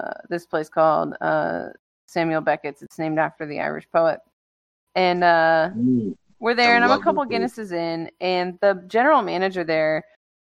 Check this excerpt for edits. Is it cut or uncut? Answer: uncut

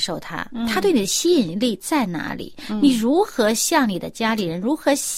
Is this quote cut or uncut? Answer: uncut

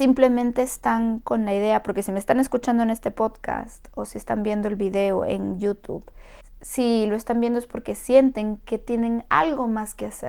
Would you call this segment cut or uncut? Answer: uncut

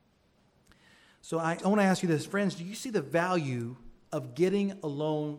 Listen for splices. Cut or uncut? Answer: cut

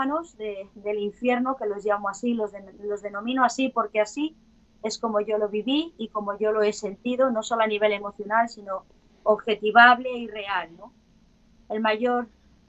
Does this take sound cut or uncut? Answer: cut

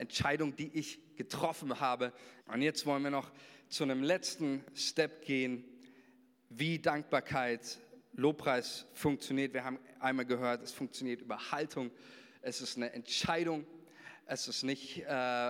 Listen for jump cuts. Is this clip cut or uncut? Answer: cut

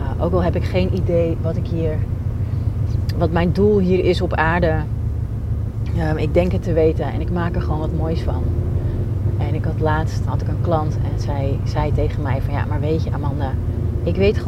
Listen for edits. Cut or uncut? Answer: cut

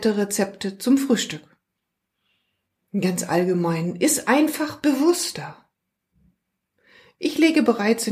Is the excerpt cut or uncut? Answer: cut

